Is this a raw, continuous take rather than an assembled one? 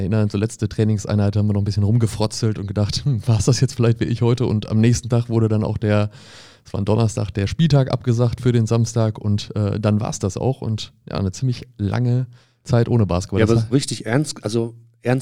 no; 1 cut; at 13.7 s

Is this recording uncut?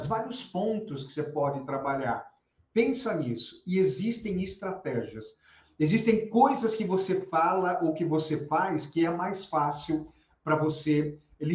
yes; 0 cuts

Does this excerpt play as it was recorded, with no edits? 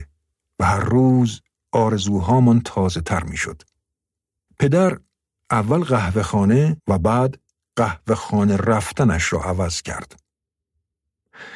no; 2 cuts; at 4.5 s, 6.8 s

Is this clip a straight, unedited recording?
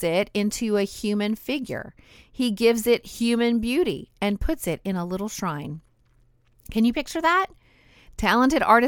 yes; 0 cuts

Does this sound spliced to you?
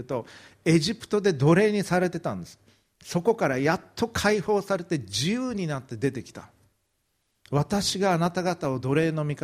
no; 0 cuts

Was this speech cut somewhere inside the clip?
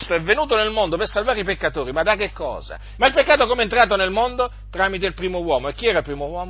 yes; 1 cut; at 3.0 s

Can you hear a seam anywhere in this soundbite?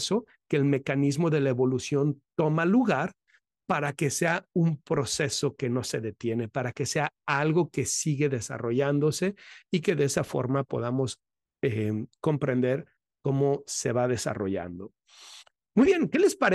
no; 0 cuts

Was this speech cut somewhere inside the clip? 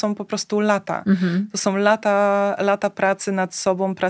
no; 0 cuts

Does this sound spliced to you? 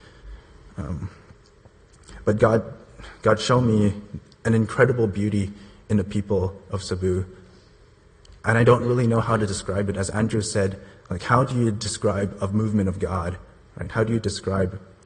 no; 0 cuts

